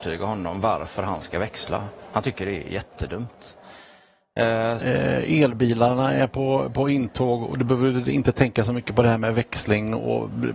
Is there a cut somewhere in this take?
yes; 1 cut; at 4.8 s

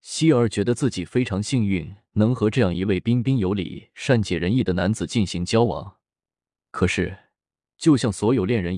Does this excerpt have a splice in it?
yes; 1 cut; at 6.6 s

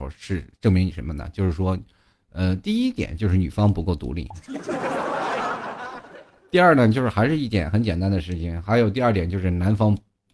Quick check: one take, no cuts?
yes; 0 cuts

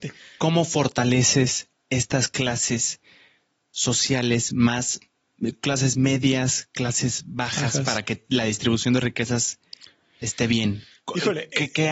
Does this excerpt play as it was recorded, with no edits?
yes; 0 cuts

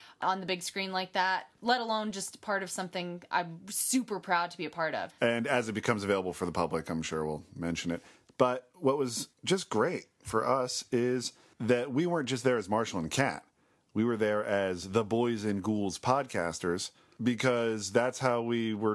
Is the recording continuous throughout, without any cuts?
no; 1 cut; at 5.1 s

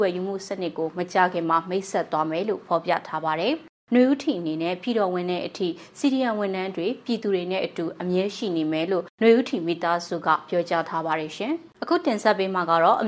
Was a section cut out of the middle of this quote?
yes; 1 cut; at 11.7 s

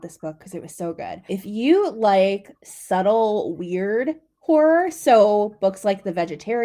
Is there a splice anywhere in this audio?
yes; 1 cut; at 1.3 s

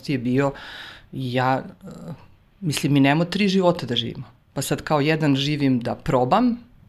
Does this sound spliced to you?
no; 0 cuts

